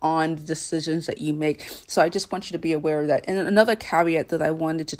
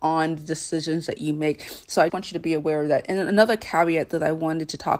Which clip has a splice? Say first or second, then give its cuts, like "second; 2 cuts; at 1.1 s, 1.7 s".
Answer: second; 1 cut; at 2.1 s